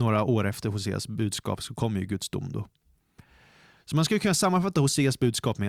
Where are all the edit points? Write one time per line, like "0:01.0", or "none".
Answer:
none